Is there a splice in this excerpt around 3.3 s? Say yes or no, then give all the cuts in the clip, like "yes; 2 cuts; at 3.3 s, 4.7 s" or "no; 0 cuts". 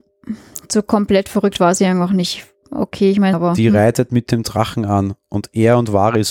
yes; 1 cut; at 3.3 s